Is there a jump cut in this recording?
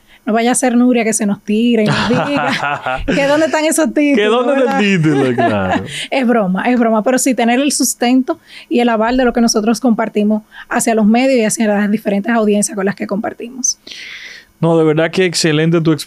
no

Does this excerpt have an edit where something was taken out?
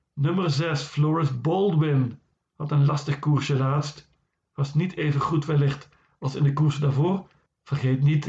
no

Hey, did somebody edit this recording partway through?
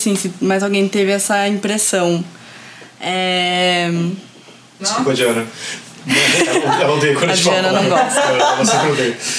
yes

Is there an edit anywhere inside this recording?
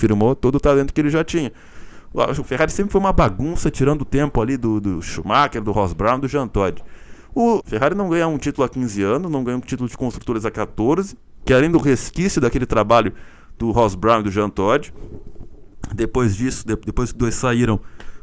yes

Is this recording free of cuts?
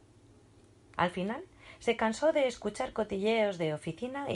no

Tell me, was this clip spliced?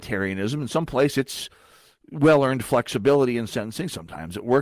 no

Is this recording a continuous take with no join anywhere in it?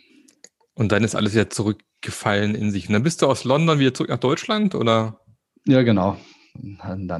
yes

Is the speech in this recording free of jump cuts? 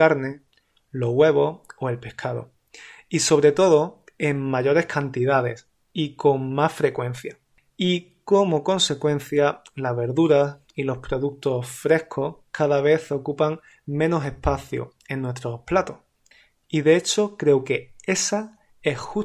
yes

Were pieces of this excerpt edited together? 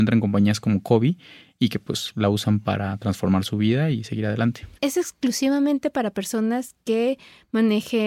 yes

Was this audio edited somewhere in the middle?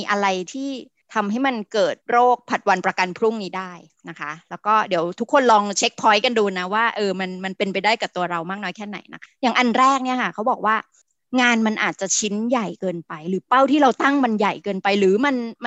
no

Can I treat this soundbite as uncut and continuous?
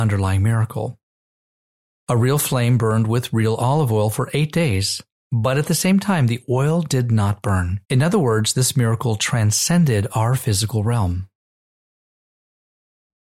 no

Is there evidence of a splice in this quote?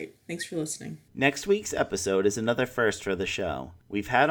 yes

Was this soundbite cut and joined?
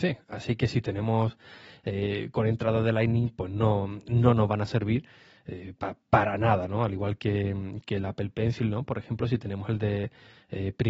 no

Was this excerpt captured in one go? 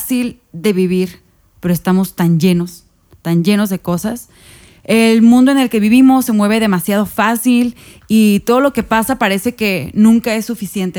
yes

